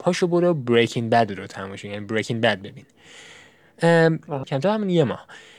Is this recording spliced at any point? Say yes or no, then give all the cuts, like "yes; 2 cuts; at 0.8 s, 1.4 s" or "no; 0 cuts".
yes; 1 cut; at 4.4 s